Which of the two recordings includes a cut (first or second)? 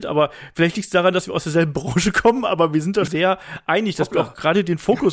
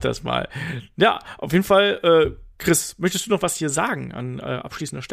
first